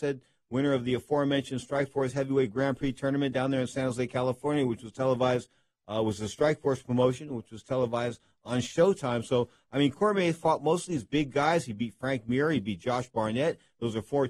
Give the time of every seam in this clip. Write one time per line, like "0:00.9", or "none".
none